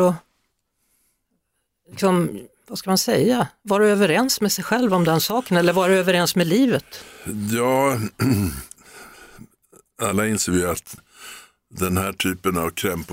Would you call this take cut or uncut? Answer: uncut